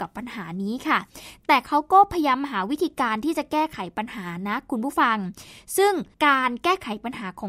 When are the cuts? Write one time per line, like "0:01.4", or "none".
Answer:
0:06.1